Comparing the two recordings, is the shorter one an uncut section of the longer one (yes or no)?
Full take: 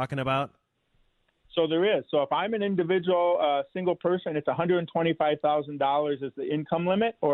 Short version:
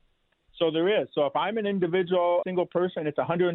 no